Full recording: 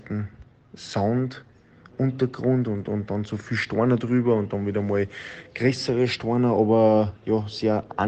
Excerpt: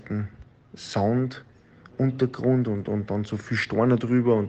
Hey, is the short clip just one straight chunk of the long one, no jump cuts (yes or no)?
yes